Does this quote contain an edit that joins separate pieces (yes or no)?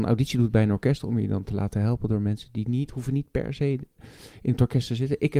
no